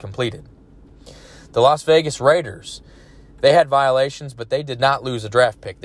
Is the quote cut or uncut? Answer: uncut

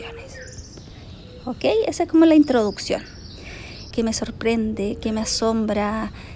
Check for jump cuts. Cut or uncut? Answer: cut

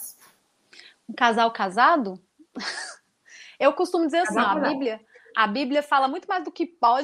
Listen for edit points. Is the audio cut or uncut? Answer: uncut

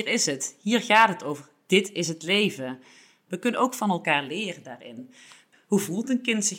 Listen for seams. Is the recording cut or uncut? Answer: cut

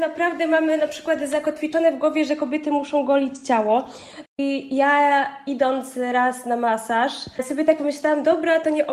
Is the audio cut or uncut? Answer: cut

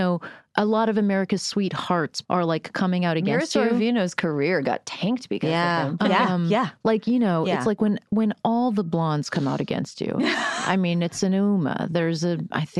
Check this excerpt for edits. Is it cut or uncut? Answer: cut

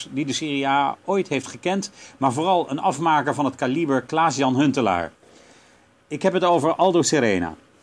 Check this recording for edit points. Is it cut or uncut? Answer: uncut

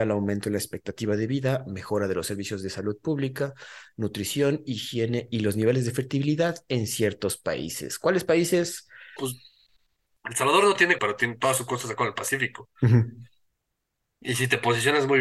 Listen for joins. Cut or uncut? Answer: cut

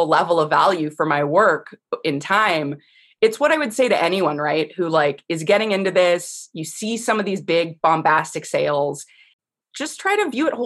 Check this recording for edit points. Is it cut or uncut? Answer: uncut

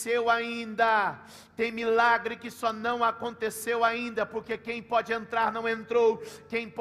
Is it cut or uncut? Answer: uncut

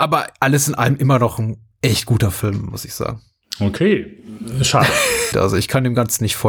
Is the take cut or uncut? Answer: cut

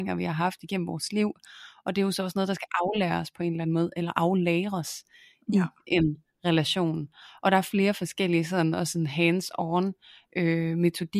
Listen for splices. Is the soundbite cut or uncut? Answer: uncut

